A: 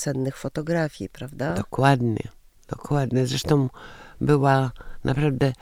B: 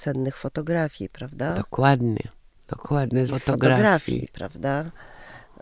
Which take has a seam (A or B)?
B